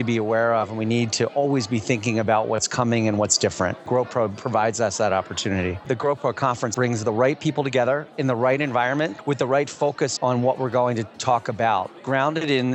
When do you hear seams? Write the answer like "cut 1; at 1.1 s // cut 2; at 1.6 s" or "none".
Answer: cut 1; at 5.8 s // cut 2; at 10.2 s